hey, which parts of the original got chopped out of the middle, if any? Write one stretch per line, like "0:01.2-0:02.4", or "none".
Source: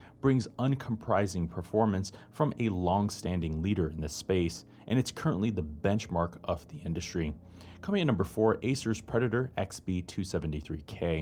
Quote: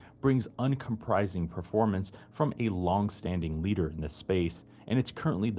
none